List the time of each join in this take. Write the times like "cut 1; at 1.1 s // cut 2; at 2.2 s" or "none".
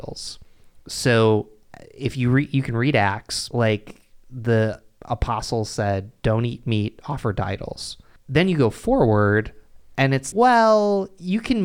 cut 1; at 3.5 s // cut 2; at 8.2 s // cut 3; at 10.3 s